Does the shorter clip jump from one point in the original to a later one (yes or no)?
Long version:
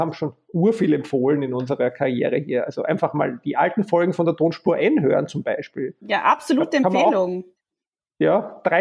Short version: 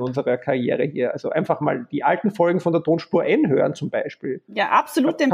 no